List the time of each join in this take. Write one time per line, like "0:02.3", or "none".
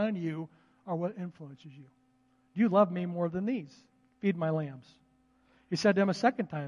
0:04.1